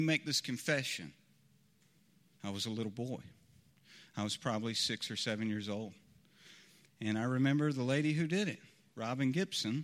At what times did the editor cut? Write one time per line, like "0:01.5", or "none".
0:02.4